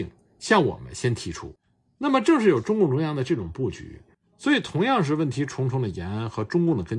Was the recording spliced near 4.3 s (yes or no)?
no